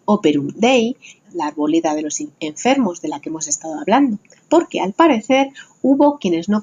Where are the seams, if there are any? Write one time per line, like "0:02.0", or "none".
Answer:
0:01.2